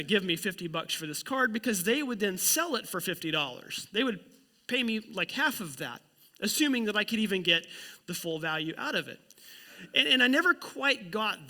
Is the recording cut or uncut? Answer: uncut